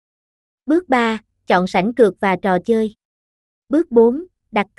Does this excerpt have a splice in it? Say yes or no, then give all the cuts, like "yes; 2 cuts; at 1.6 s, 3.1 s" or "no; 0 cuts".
yes; 1 cut; at 3.6 s